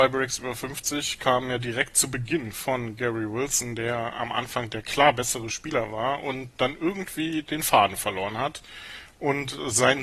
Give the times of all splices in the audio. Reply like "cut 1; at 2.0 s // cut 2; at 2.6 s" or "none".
none